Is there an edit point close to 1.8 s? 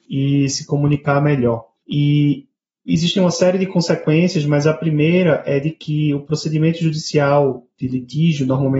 yes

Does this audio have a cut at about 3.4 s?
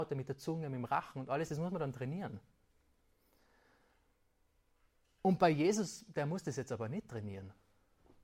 no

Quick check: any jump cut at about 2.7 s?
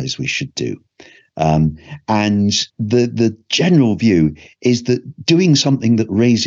yes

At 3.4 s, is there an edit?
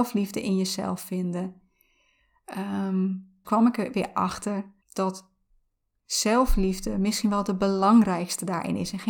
yes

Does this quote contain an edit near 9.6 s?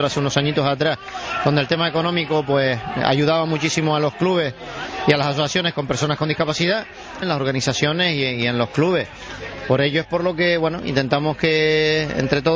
no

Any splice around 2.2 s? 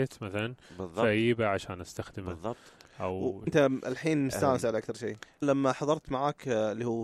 no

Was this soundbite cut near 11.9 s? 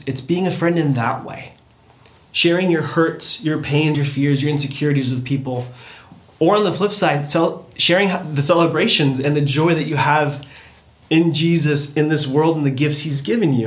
no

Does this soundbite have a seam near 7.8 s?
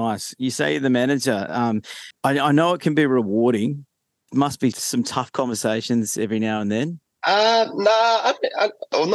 no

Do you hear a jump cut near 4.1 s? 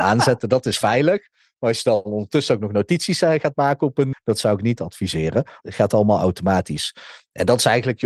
yes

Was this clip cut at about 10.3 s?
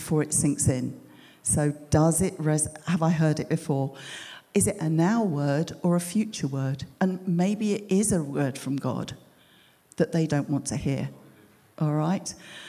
yes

